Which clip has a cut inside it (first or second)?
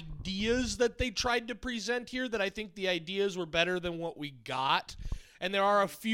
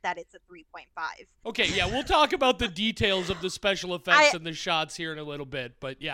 second